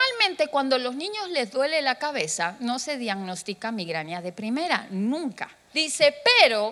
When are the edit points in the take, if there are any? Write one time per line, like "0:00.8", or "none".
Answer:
0:05.7